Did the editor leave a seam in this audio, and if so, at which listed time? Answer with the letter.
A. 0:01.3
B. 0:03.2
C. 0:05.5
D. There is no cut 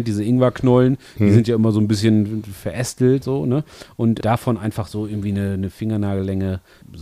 B